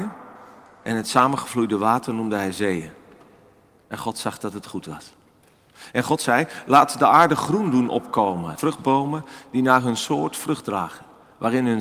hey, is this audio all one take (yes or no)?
no